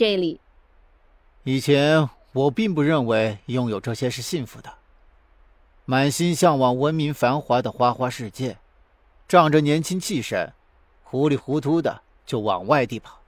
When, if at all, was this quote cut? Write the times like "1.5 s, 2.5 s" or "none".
none